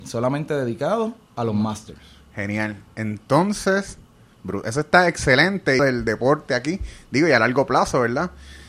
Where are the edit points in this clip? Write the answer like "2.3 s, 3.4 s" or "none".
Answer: 5.8 s